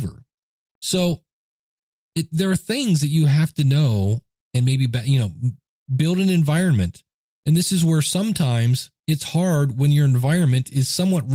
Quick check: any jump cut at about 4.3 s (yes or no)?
yes